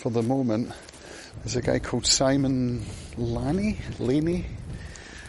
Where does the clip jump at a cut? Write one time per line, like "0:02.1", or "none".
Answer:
0:01.3